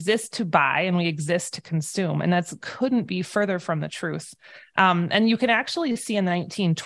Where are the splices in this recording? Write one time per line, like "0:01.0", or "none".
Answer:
none